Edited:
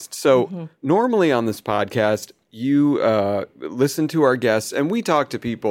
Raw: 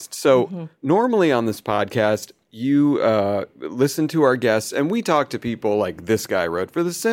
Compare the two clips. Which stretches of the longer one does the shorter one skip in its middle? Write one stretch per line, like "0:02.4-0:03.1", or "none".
none

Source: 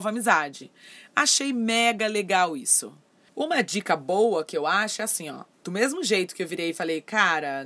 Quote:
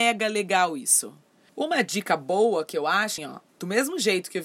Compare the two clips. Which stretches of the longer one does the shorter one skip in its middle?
0:05.0-0:05.2

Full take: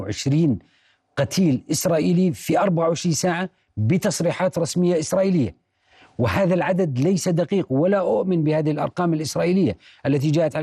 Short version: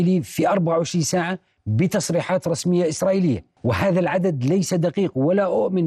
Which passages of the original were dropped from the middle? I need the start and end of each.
0:05.7-0:06.1

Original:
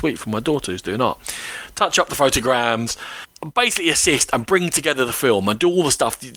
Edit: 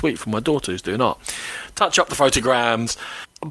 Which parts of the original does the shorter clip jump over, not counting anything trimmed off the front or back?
none

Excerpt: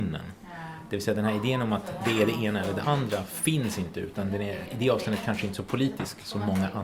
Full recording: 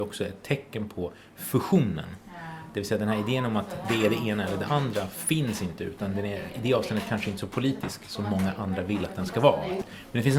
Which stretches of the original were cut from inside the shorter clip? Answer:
none

